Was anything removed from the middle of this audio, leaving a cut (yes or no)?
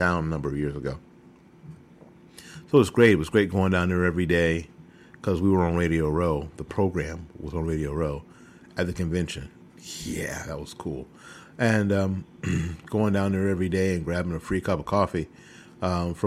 no